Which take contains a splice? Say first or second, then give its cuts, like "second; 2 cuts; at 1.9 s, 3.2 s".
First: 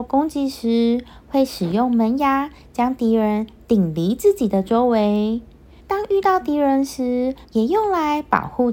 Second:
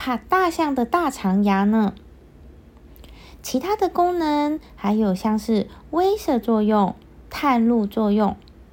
first; 2 cuts; at 5.8 s, 7.4 s